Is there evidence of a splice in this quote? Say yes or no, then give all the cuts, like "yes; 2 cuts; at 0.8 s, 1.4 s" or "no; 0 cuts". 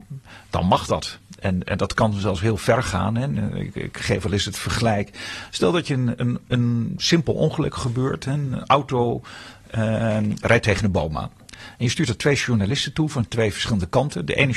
no; 0 cuts